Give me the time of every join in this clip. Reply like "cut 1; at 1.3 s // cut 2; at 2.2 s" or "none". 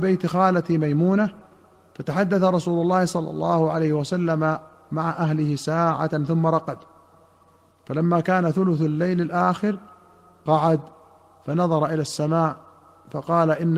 none